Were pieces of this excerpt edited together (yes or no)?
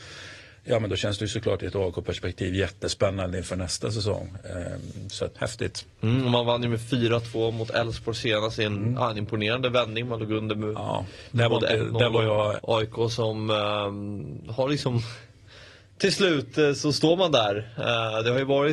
yes